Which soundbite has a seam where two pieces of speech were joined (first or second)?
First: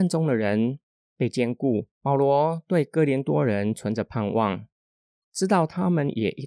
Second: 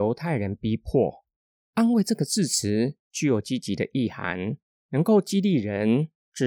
first